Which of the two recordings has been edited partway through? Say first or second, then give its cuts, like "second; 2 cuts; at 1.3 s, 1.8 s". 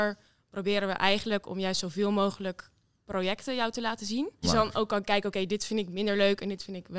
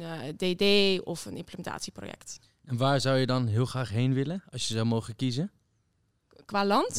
first; 1 cut; at 4.4 s